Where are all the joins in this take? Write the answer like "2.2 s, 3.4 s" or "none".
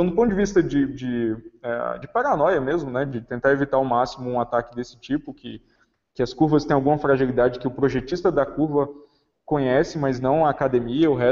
none